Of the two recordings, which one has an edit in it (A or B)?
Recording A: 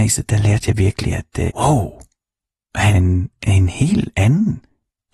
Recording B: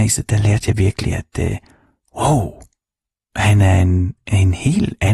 A